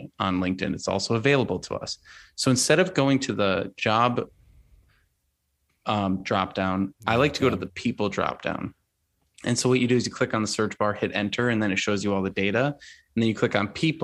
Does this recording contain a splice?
no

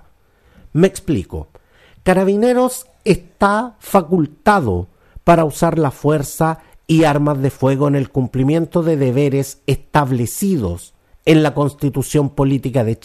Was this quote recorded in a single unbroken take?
yes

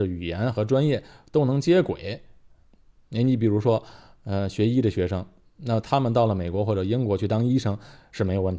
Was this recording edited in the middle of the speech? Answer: no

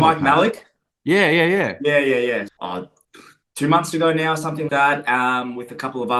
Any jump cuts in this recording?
yes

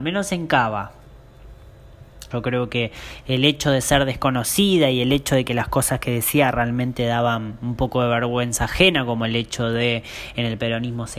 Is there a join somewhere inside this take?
yes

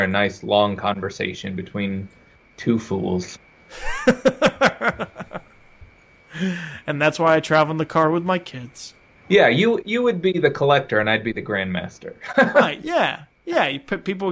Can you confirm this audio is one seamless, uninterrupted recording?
yes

